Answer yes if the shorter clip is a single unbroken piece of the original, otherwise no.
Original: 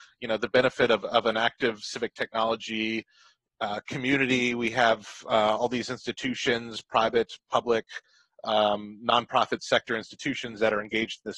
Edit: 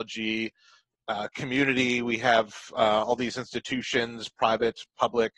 yes